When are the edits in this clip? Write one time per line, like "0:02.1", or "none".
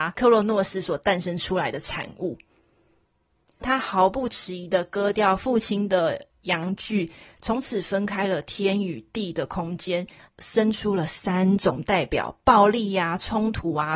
0:03.6
0:10.2